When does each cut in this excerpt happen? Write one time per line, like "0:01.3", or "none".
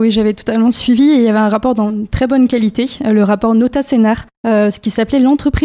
0:04.3